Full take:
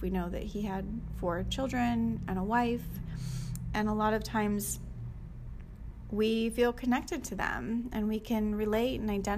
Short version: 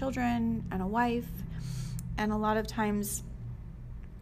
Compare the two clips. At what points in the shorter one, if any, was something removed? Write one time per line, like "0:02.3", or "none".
none